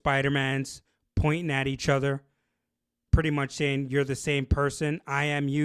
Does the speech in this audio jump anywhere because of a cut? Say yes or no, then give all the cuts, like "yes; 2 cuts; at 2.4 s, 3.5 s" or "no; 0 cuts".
no; 0 cuts